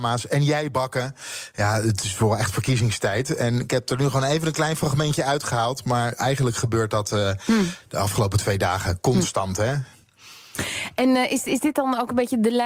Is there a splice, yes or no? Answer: no